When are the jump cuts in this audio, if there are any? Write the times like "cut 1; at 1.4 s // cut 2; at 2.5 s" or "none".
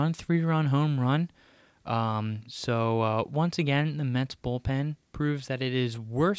none